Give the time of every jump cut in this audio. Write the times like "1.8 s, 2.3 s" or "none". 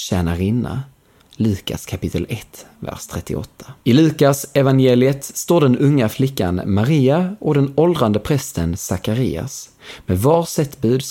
1.2 s, 3.8 s